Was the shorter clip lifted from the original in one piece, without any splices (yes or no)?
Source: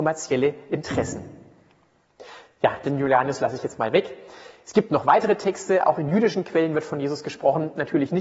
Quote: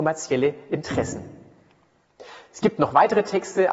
no